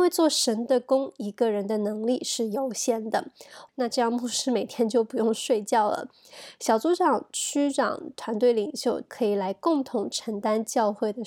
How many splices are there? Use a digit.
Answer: 2